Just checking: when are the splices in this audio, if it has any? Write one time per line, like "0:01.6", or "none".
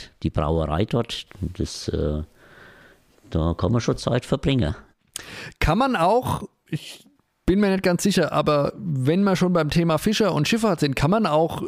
none